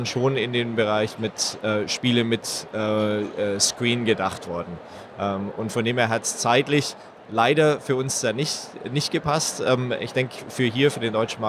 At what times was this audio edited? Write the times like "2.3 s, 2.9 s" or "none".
7.2 s